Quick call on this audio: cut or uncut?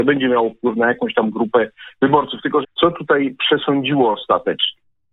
cut